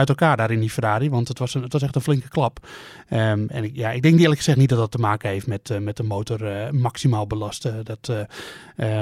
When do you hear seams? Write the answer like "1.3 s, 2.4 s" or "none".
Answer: none